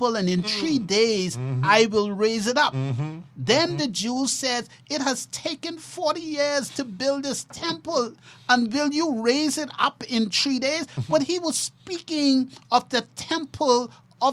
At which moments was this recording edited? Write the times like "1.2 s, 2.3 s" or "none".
none